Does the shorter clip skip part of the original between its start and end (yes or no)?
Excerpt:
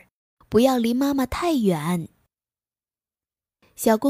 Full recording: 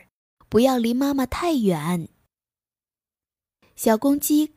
no